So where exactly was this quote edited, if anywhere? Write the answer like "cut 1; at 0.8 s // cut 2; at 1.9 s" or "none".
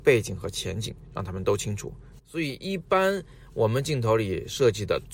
cut 1; at 2.2 s

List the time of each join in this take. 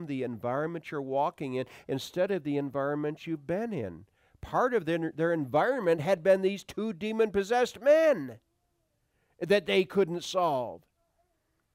none

